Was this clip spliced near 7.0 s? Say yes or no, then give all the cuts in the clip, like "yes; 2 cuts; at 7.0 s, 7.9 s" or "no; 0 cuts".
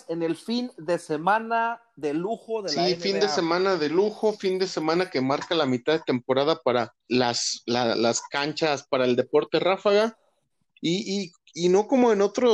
yes; 1 cut; at 7.0 s